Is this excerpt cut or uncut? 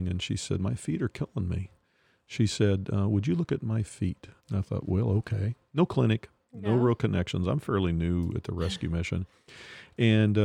cut